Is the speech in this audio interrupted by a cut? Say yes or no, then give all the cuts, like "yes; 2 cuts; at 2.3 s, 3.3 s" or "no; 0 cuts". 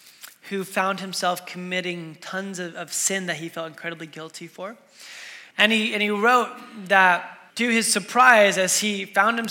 yes; 2 cuts; at 5.5 s, 7.5 s